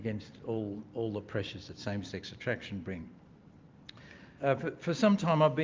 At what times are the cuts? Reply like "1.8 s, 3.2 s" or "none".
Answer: 4.4 s